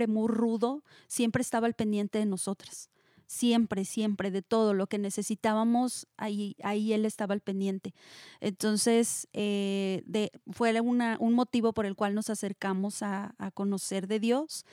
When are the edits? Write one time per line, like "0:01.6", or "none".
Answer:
none